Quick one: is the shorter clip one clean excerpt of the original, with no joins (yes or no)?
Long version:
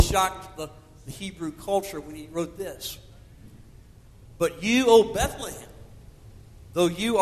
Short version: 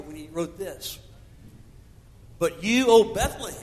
yes